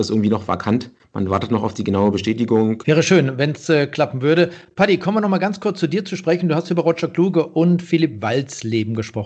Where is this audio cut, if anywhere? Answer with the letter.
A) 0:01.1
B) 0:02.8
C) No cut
B